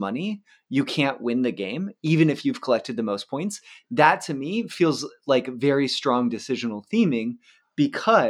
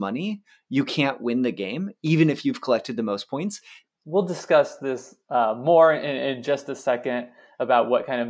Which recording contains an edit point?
second; 1 cut; at 3.9 s

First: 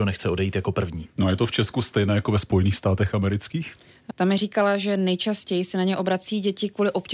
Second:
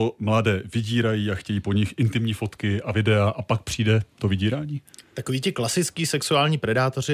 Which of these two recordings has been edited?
first; 1 cut; at 4.1 s

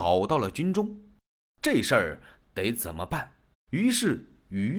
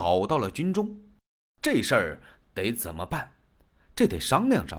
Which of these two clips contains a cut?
first; 1 cut; at 3.5 s

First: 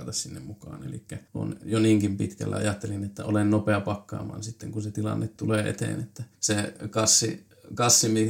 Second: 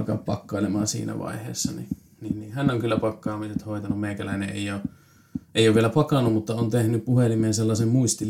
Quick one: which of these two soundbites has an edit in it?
first; 2 cuts; at 1.3 s, 6.3 s

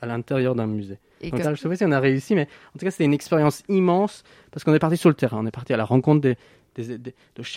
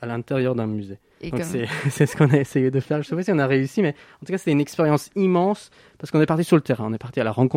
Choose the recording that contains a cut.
first; 1 cut; at 1.4 s

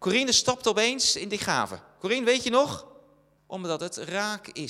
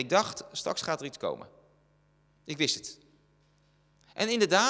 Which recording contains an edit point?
first; 1 cut; at 3.4 s

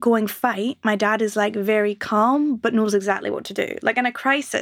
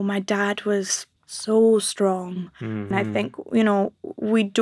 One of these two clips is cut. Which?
second; 2 cuts; at 1.2 s, 2.9 s

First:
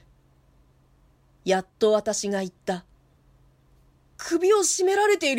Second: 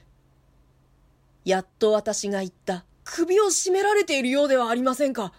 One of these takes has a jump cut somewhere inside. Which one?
second; 1 cut; at 2.9 s

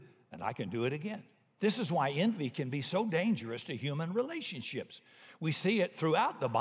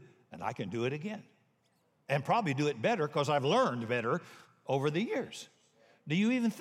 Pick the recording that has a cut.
first; 1 cut; at 1.6 s

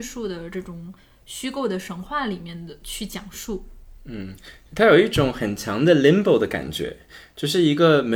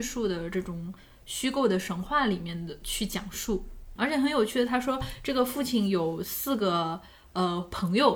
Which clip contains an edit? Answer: second; 1 cut; at 4.0 s

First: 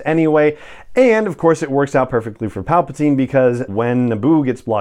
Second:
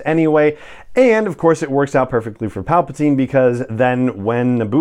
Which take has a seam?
first; 1 cut; at 3.7 s

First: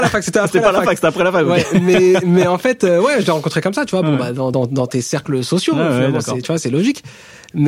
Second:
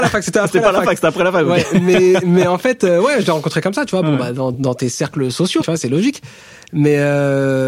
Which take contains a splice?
second; 2 cuts; at 4.5 s, 5.6 s

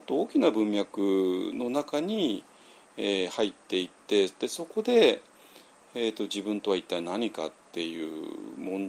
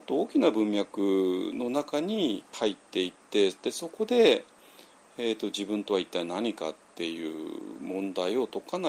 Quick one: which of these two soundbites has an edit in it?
second; 1 cut; at 2.5 s

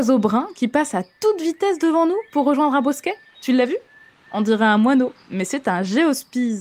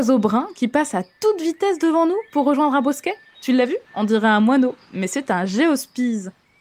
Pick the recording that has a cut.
second; 1 cut; at 3.9 s

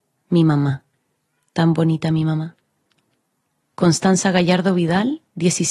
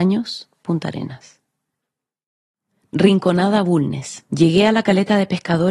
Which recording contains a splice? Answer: second; 1 cut; at 4.3 s

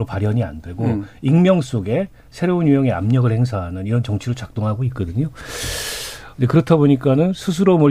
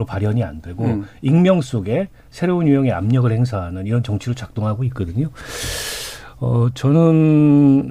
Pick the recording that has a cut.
first; 1 cut; at 6.3 s

